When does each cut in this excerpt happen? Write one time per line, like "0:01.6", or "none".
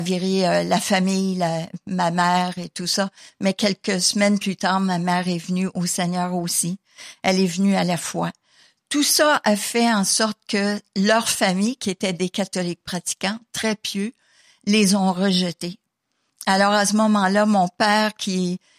none